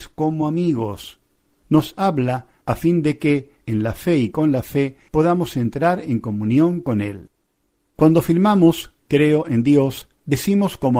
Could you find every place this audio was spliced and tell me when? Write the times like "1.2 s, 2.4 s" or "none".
none